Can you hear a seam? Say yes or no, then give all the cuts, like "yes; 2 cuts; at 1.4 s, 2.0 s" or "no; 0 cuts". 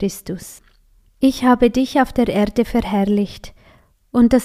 no; 0 cuts